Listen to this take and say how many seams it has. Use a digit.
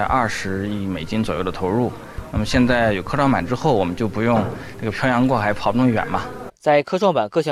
2